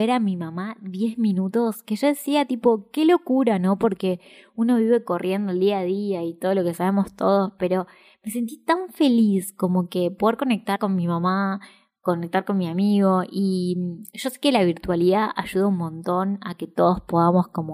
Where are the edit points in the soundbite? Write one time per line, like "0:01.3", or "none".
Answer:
none